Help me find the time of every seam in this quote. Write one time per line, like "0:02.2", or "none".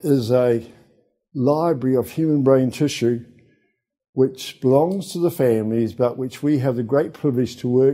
none